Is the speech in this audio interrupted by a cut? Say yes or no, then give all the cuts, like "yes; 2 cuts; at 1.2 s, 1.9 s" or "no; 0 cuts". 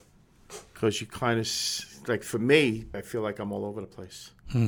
yes; 1 cut; at 2.9 s